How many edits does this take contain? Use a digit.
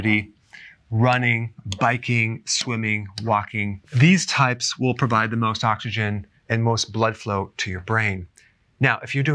0